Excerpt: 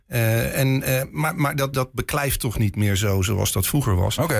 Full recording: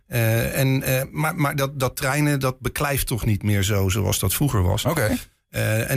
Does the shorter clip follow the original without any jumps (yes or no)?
no